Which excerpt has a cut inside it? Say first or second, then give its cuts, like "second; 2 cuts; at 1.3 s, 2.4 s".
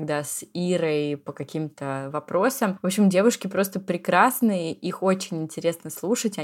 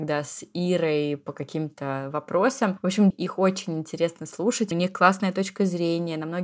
second; 2 cuts; at 3.1 s, 4.7 s